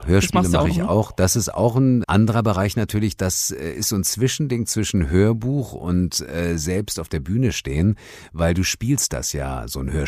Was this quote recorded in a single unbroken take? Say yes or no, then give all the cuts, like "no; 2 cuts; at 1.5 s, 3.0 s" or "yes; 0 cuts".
no; 1 cut; at 2.0 s